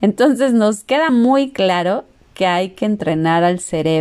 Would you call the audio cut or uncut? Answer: uncut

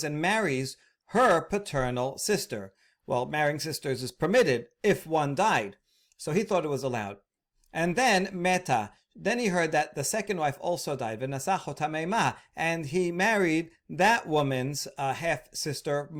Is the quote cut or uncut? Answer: uncut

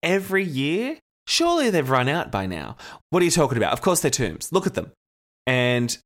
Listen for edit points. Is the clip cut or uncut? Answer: cut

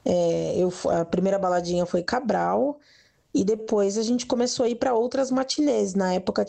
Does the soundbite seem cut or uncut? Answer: uncut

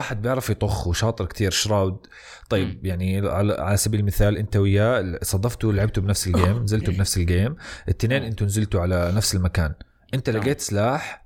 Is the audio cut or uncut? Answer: uncut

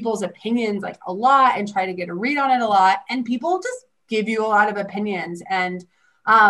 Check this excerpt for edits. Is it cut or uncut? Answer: uncut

